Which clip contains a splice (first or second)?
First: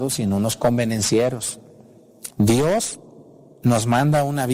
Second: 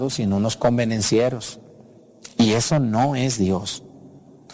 first